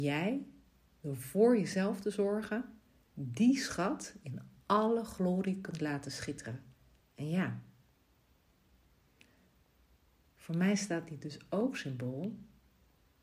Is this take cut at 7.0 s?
yes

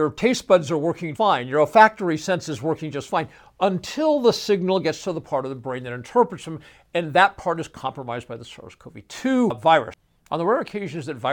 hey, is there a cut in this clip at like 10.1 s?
no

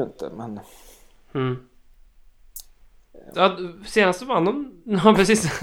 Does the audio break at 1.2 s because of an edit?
no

